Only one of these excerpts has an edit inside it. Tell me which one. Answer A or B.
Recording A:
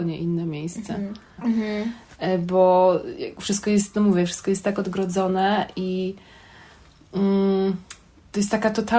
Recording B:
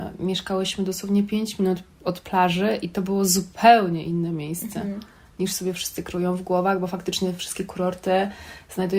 A